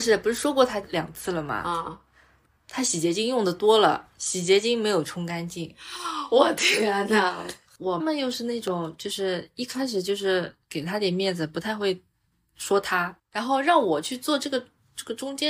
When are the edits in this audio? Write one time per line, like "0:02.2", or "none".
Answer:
0:08.0
0:13.2